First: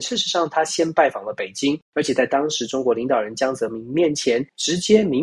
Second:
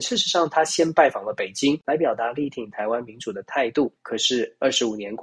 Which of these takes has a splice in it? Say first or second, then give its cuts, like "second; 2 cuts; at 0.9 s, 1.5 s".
second; 1 cut; at 1.8 s